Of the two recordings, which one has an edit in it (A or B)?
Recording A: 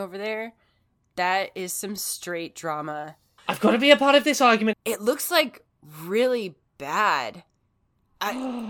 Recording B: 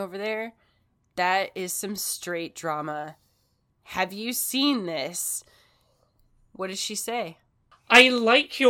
A